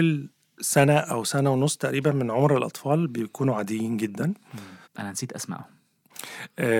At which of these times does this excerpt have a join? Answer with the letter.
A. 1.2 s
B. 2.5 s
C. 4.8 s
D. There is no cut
C